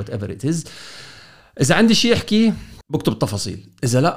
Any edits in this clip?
yes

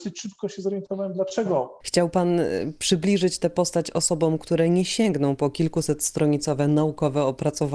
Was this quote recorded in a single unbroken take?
no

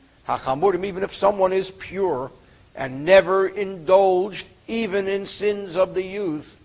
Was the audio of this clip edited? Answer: no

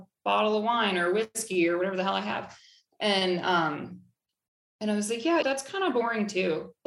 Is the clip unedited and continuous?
no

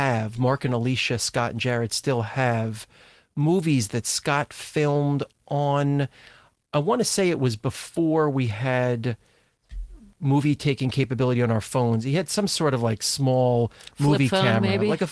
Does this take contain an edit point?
no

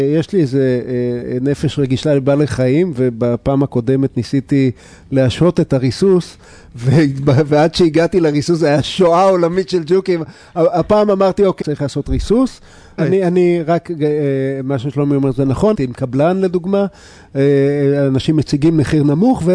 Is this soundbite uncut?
no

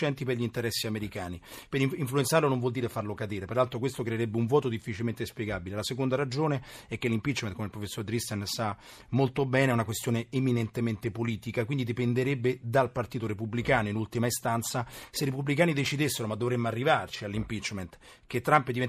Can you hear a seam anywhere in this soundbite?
no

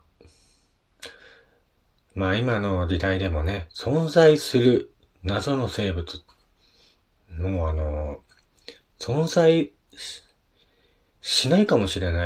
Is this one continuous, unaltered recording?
yes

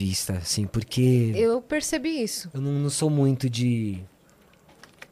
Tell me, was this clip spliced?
no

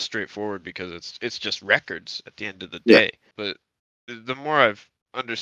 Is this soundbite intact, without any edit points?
no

